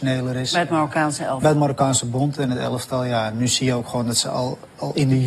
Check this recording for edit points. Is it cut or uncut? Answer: uncut